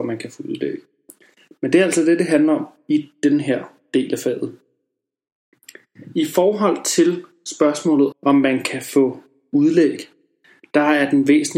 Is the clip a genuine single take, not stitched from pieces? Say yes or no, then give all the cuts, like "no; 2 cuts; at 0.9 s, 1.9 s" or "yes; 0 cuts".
no; 1 cut; at 8.1 s